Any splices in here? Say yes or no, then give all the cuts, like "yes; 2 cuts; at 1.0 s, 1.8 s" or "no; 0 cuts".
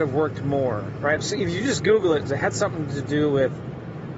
yes; 2 cuts; at 1.2 s, 2.2 s